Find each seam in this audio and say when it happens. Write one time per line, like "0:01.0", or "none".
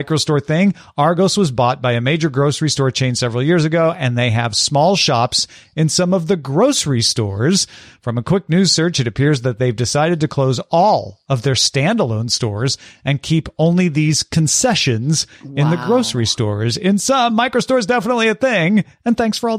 none